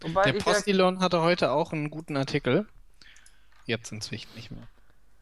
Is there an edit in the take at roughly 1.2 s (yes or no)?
no